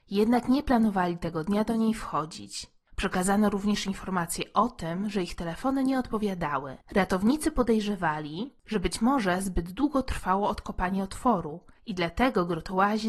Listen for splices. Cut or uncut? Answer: cut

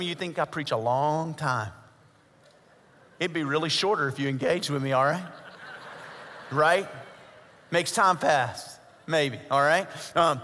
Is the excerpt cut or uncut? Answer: uncut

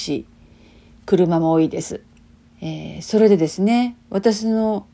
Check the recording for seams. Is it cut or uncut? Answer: cut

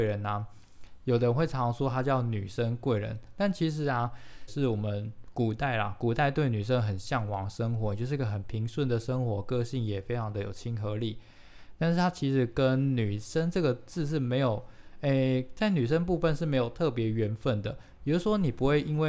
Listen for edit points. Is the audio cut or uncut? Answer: cut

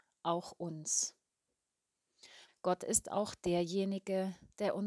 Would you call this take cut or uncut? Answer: cut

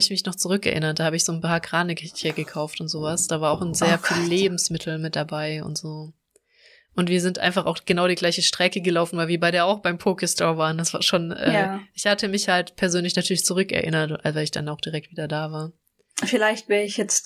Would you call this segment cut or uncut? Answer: uncut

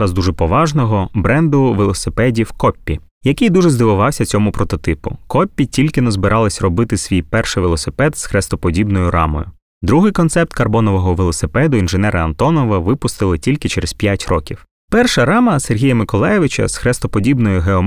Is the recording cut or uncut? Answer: cut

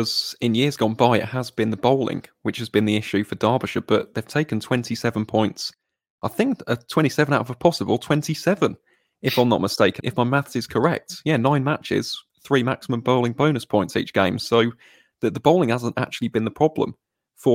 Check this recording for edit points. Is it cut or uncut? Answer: cut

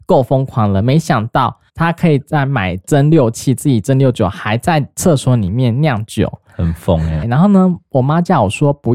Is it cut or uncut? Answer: cut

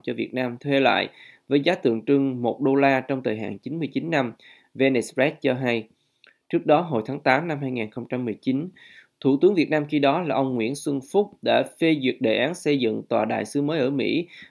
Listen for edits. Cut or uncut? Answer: uncut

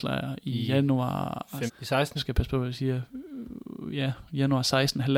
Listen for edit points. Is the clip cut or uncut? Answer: cut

